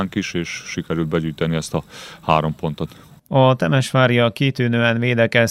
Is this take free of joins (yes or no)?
yes